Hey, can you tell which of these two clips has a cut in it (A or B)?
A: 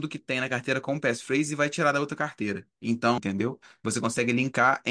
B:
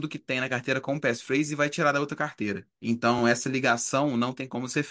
A